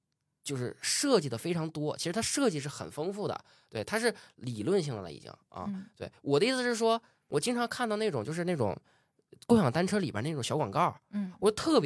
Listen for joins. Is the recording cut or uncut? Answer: uncut